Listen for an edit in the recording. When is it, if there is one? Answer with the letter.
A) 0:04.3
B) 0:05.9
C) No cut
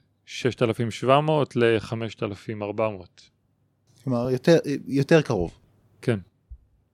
C